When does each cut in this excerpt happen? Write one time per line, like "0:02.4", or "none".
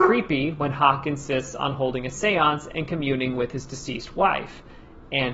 none